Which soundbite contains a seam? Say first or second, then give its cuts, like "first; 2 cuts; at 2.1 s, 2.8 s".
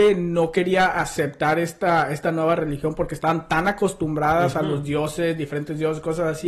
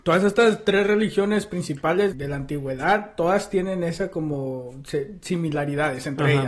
second; 1 cut; at 2.1 s